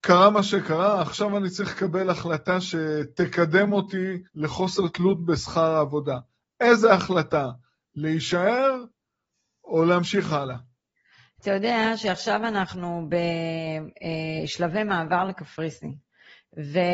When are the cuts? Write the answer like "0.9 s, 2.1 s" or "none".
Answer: 4.3 s